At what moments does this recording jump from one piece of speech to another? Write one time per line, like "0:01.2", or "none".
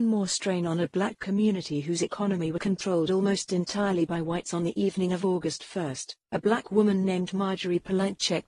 0:02.6